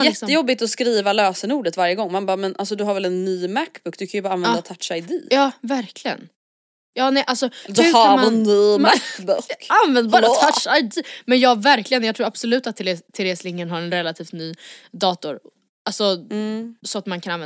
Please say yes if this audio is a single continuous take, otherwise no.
yes